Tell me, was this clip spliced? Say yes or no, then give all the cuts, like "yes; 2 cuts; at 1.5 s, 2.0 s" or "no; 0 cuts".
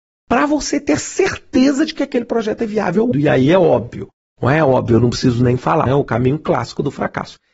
yes; 2 cuts; at 3.1 s, 5.9 s